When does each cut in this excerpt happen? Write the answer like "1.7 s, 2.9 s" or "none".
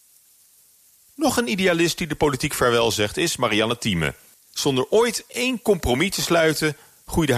4.3 s